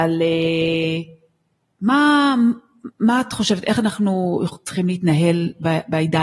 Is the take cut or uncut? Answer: uncut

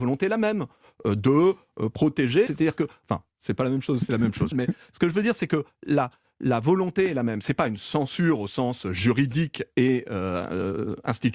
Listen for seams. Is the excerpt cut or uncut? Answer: cut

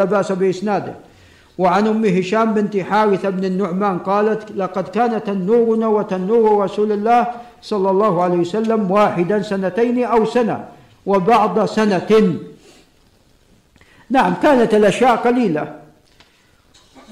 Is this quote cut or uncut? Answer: uncut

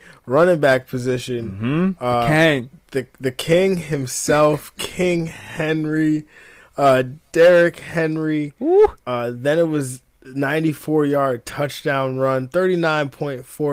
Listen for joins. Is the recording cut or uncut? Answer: cut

